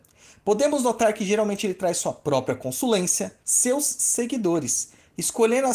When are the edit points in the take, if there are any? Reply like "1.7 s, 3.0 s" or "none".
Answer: 3.4 s